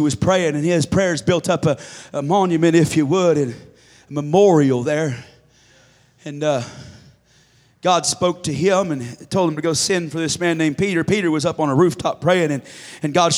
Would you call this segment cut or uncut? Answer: uncut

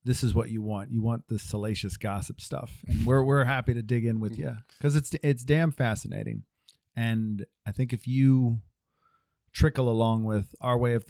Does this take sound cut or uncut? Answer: uncut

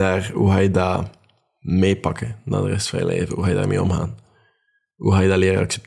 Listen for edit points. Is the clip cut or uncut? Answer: uncut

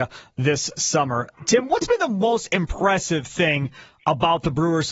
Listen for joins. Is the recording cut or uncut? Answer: uncut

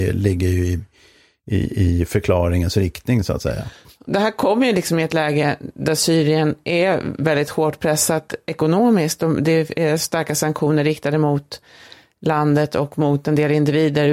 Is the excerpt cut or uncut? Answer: uncut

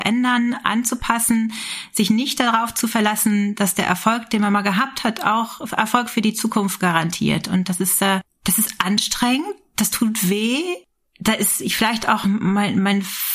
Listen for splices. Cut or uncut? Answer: uncut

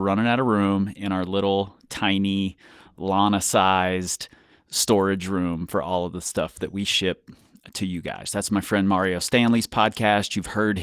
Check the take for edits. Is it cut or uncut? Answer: cut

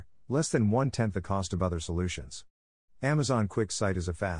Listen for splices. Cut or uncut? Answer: cut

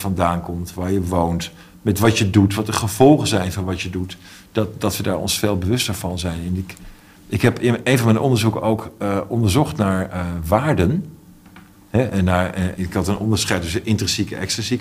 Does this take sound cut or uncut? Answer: cut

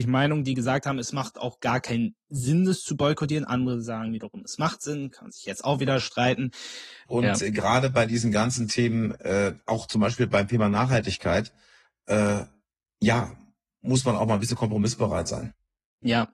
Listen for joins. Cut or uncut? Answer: cut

